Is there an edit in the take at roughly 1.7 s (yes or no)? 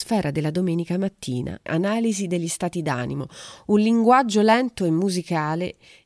yes